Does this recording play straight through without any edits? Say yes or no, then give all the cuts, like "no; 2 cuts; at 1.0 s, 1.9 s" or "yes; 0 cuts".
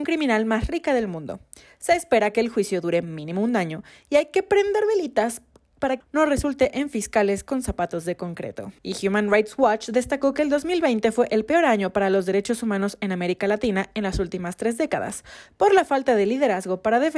no; 2 cuts; at 6.0 s, 8.8 s